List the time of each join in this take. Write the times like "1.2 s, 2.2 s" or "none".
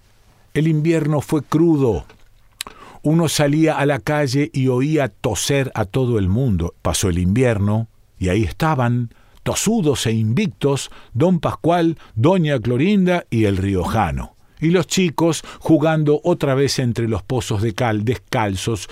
6.7 s, 14.5 s